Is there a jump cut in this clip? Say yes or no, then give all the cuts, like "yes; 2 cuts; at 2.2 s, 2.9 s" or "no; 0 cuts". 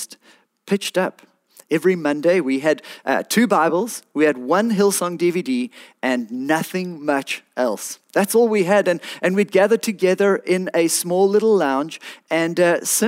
no; 0 cuts